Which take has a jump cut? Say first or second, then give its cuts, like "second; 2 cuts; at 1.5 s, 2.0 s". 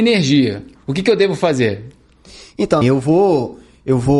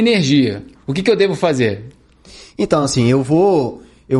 first; 1 cut; at 2.8 s